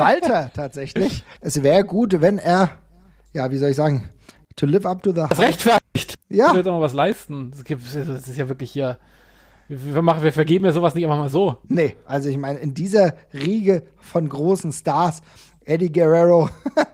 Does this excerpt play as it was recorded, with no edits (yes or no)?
no